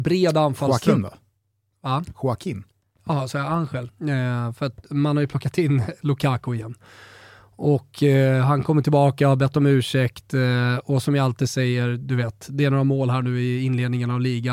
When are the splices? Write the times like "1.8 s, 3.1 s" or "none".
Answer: 3.9 s